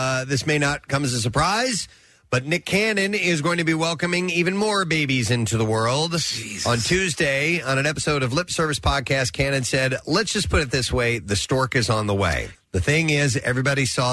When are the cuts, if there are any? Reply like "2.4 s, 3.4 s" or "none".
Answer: 12.5 s